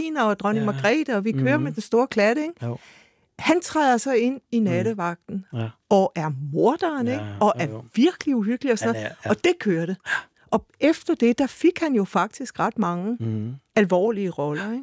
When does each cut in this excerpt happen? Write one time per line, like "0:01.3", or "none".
none